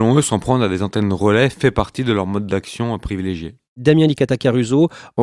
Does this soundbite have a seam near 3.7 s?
no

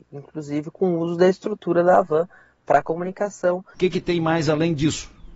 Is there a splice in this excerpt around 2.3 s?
no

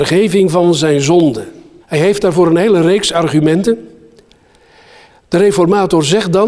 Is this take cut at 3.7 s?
no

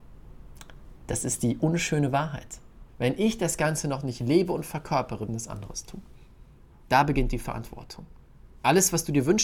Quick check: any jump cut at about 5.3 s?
yes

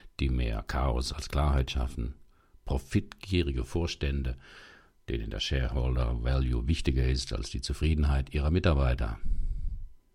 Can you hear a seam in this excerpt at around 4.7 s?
no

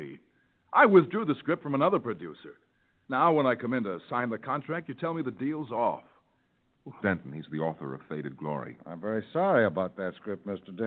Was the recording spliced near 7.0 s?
yes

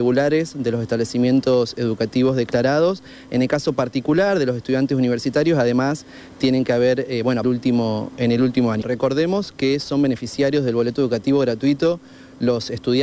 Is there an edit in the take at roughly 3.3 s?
no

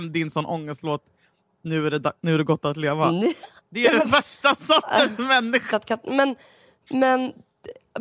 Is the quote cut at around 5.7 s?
yes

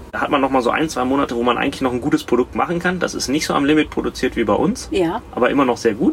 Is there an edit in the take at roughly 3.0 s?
no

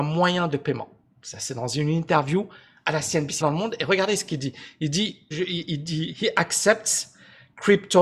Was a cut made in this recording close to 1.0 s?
no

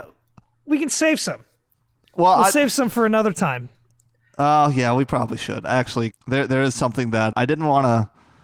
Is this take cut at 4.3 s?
no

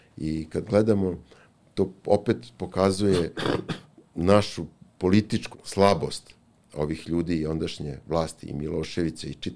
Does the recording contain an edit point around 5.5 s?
yes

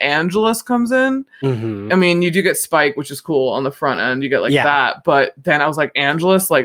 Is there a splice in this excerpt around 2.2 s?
no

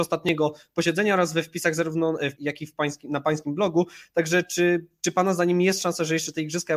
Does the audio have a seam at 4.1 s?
no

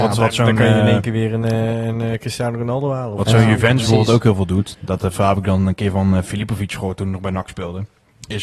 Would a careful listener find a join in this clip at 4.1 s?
no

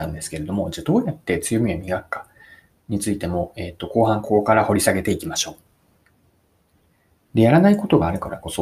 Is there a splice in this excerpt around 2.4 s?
no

